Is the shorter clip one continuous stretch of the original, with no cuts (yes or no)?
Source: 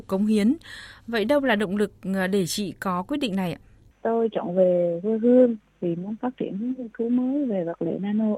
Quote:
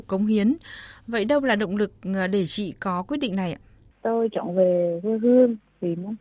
yes